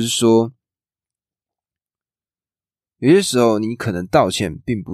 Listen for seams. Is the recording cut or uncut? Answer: uncut